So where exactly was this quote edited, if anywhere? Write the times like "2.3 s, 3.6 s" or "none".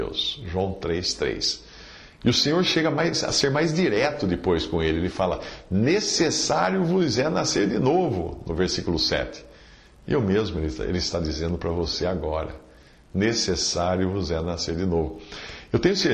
none